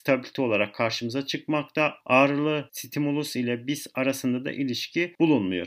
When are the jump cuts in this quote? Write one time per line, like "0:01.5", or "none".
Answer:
none